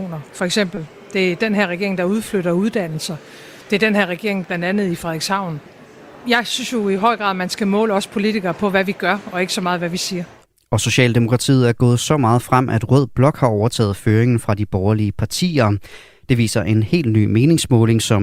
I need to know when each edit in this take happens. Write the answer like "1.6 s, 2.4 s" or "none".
4.4 s